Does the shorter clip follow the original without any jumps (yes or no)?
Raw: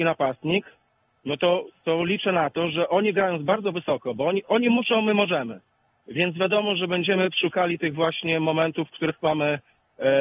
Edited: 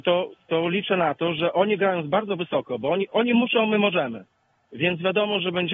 yes